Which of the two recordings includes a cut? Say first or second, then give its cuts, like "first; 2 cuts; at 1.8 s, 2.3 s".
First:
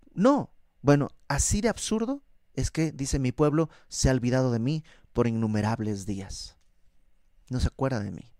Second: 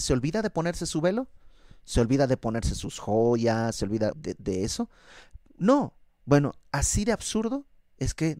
second; 1 cut; at 4.1 s